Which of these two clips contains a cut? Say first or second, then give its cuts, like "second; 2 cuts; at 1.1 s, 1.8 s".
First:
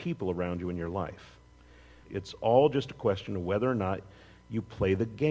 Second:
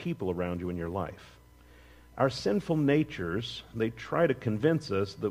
first; 1 cut; at 2.0 s